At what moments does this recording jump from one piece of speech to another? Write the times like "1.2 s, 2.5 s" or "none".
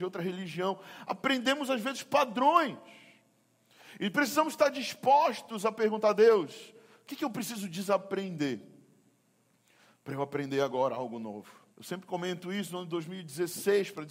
11.7 s